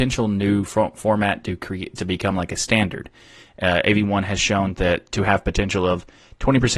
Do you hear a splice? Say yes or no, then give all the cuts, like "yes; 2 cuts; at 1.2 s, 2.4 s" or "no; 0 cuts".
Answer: no; 0 cuts